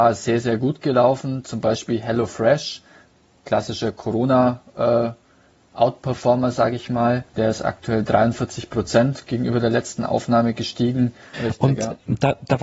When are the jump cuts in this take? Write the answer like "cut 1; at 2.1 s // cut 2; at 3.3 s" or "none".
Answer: cut 1; at 7.3 s // cut 2; at 11.3 s